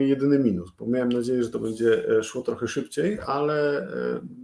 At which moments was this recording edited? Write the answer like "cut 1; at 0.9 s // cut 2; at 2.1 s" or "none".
none